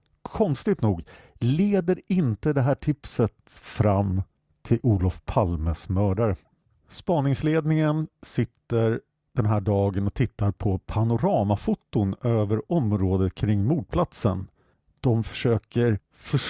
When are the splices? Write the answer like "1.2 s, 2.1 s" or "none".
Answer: none

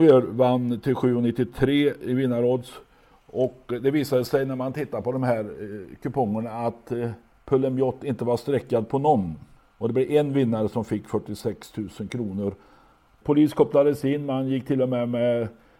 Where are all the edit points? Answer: 13.2 s

